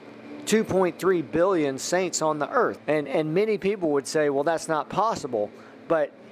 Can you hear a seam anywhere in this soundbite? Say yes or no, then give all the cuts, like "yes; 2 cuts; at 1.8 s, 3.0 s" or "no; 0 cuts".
yes; 1 cut; at 2.8 s